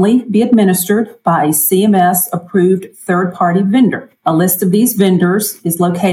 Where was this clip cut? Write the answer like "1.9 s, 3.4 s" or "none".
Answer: 4.2 s